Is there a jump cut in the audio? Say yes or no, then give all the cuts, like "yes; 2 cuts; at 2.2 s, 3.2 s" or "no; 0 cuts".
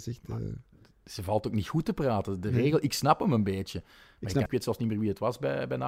yes; 1 cut; at 4.5 s